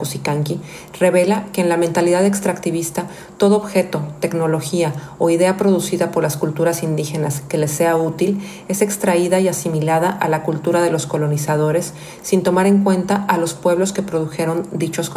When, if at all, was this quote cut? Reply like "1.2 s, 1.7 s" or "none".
none